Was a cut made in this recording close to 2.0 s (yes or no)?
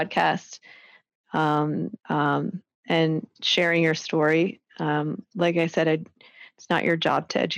yes